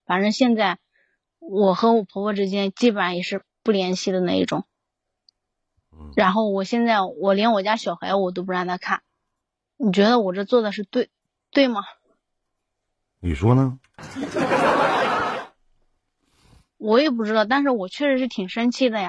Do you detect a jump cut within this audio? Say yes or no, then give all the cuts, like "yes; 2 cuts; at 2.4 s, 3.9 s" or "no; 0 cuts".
no; 0 cuts